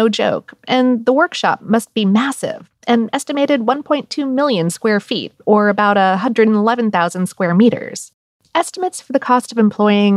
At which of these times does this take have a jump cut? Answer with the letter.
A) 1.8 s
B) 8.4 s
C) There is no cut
B